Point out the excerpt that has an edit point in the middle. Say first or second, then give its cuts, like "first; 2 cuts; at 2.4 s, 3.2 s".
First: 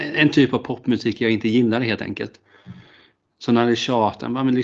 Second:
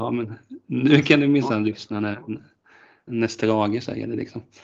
second; 1 cut; at 3.1 s